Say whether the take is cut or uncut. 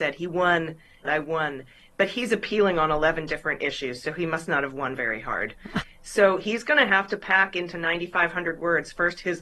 cut